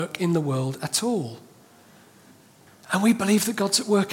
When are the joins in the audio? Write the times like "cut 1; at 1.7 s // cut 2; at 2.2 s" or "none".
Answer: none